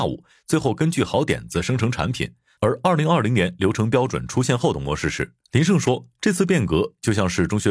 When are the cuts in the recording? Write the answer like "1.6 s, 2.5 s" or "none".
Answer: 2.6 s, 5.4 s